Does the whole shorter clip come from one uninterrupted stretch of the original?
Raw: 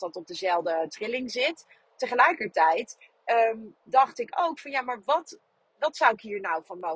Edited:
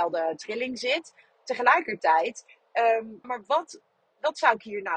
no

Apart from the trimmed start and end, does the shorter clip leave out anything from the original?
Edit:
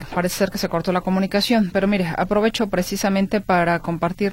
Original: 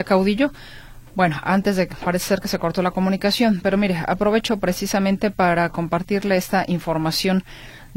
no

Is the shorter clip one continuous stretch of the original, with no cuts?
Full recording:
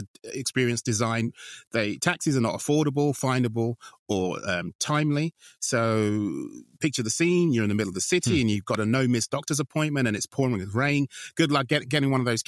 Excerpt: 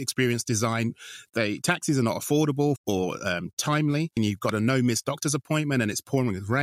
no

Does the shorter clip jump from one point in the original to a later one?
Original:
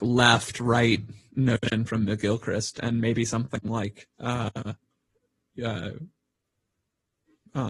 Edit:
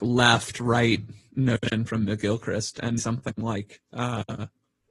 yes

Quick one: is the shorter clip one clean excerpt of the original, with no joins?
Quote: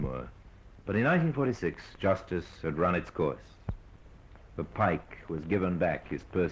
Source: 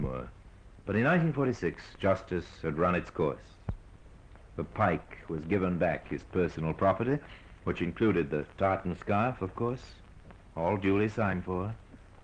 yes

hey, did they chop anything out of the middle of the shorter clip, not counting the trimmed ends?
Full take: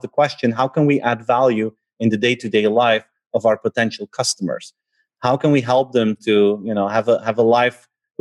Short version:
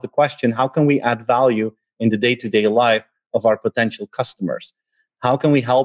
no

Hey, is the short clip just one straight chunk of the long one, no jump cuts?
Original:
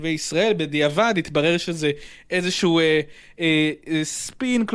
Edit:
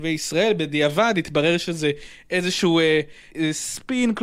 no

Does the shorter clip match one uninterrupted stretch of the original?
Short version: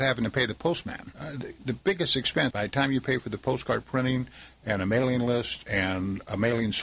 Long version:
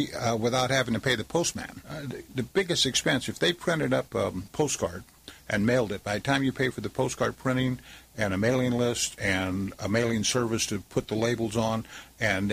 no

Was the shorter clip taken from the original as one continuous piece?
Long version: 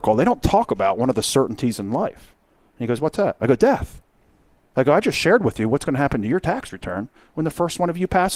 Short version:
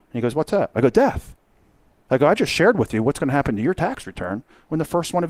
yes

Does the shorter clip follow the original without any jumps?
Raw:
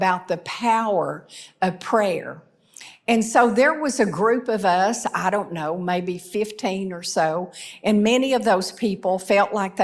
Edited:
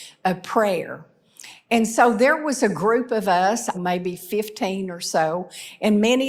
no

